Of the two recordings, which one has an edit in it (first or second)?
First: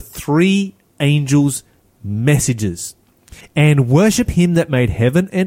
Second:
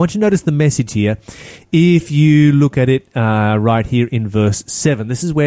first